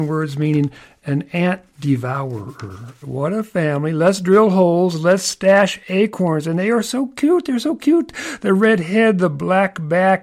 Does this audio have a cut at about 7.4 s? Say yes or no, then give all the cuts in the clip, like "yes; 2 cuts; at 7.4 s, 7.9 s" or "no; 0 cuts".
no; 1 cut; at 3.0 s